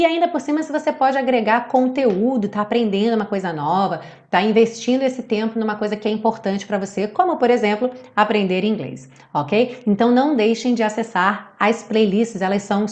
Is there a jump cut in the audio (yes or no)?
no